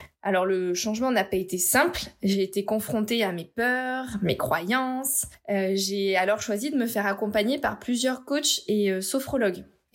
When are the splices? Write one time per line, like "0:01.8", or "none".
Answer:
none